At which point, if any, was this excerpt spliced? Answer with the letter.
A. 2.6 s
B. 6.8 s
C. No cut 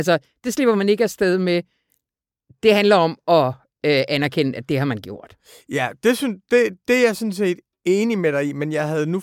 C